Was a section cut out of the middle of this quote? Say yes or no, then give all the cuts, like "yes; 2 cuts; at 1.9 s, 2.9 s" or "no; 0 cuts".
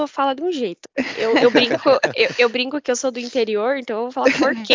no; 0 cuts